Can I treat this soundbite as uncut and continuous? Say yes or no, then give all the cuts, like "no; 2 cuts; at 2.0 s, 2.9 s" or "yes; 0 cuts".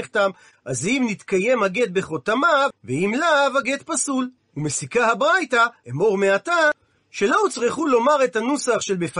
no; 2 cuts; at 2.7 s, 5.8 s